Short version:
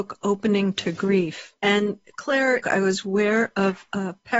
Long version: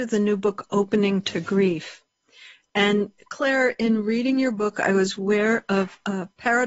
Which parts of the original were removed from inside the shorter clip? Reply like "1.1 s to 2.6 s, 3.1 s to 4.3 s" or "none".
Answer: 2.1 s to 2.7 s, 3.7 s to 4.7 s